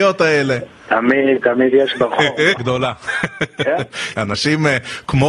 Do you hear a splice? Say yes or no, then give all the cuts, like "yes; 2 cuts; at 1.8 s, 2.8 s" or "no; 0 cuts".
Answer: yes; 2 cuts; at 2.6 s, 4.1 s